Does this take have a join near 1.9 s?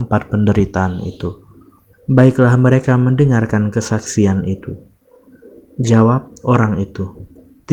yes; 1 cut; at 1.9 s

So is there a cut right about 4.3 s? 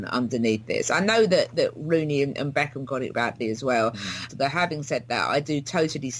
yes; 2 cuts; at 3.1 s, 4.3 s

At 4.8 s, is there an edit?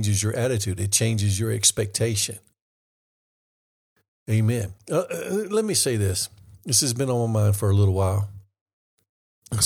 no; 0 cuts

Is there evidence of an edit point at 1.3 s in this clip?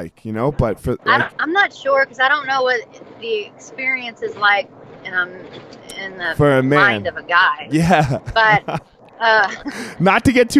yes; 1 cut; at 1.3 s

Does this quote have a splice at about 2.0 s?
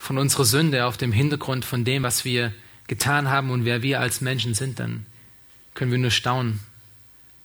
no; 0 cuts

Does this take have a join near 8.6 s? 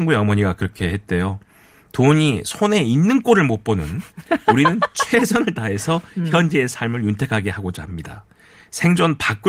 no; 0 cuts

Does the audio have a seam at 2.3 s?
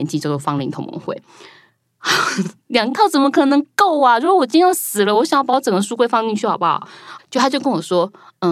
no; 1 cut; at 7.2 s

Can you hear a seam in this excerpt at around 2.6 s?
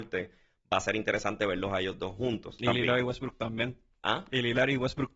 no; 0 cuts

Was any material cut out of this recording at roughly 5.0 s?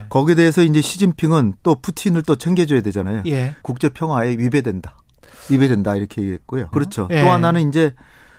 no; 2 cuts; at 3.6 s, 6.7 s

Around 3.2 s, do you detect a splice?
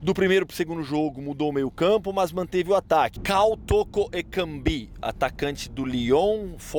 yes; 1 cut; at 3.2 s

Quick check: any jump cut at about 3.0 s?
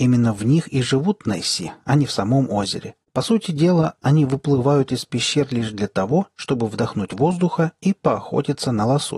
yes; 1 cut; at 3.0 s

